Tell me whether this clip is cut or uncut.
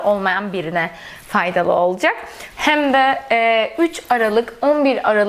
cut